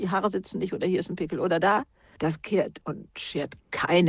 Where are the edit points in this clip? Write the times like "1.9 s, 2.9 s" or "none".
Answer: 2.2 s

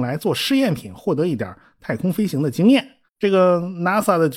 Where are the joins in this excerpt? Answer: 3.1 s

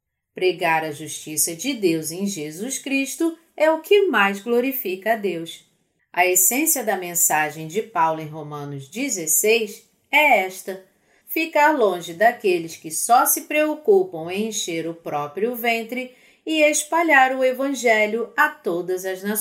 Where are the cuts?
6.0 s, 11.2 s

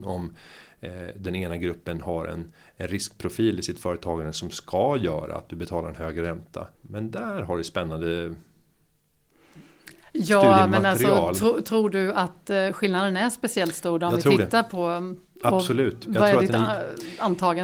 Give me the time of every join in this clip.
6.7 s

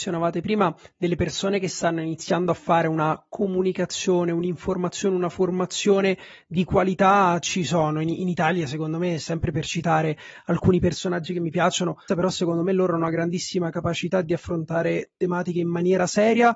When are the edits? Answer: 12.1 s

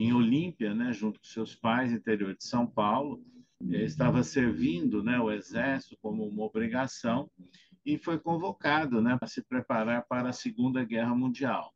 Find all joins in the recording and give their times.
3.6 s, 9.2 s

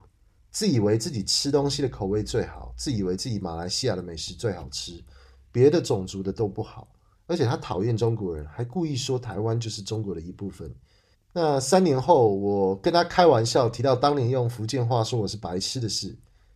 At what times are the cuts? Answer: 7.1 s, 11.1 s

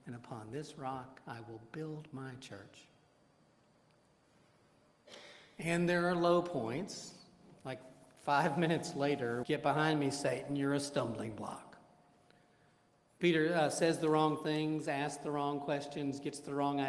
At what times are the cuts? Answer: 9.4 s

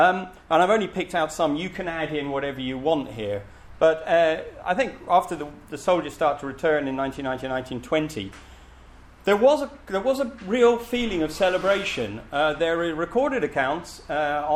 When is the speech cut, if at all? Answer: none

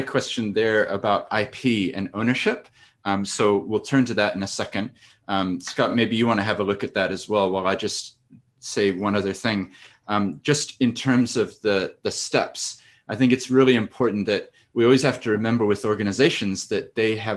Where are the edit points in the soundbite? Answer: none

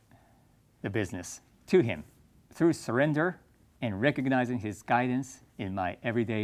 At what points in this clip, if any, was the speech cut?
2.5 s

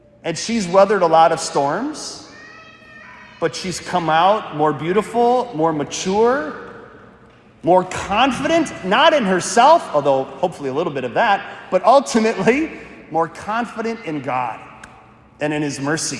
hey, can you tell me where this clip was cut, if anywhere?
none

